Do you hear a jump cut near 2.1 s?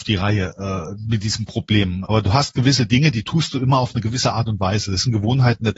yes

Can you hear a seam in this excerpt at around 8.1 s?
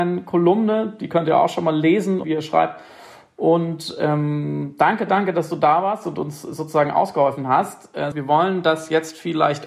yes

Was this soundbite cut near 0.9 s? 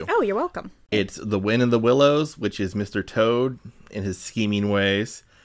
yes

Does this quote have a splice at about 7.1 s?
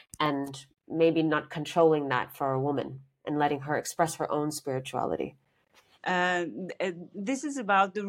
yes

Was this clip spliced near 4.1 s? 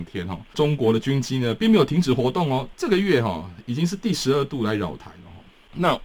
no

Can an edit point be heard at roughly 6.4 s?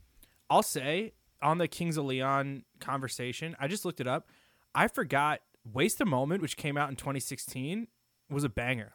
no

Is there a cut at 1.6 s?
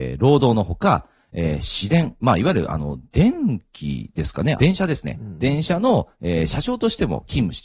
no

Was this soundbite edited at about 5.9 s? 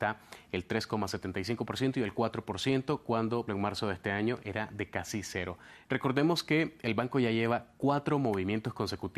yes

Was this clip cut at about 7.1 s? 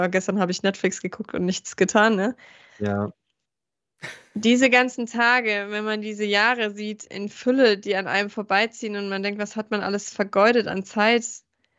yes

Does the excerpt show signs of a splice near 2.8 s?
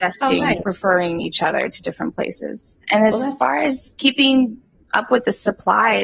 yes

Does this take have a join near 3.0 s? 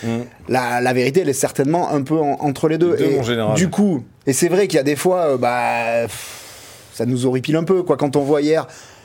no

